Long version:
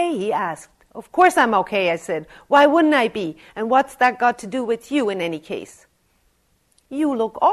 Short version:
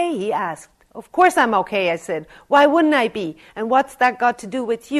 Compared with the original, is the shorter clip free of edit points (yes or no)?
yes